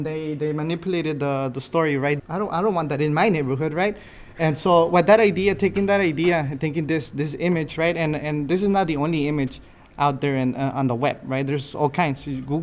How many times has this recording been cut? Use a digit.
1